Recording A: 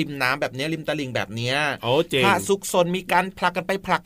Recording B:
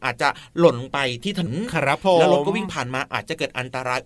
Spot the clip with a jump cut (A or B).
B